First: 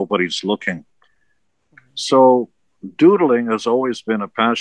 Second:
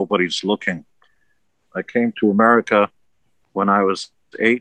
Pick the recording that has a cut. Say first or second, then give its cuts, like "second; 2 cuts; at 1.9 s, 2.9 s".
second; 1 cut; at 1.6 s